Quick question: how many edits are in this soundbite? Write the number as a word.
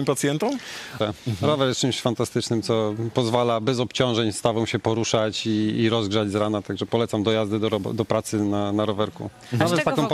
one